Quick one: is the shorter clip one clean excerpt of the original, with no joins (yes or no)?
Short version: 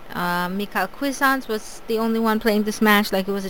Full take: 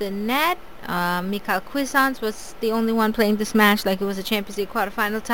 yes